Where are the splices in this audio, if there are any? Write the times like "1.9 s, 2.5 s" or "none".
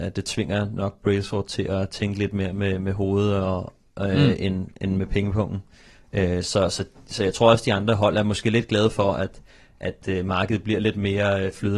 none